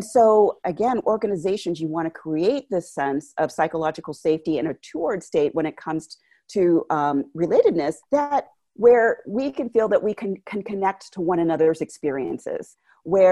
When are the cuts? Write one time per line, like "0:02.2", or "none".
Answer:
0:08.0